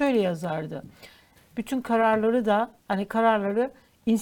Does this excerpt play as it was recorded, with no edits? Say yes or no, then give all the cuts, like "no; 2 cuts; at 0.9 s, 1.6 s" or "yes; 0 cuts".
no; 2 cuts; at 1.4 s, 2.8 s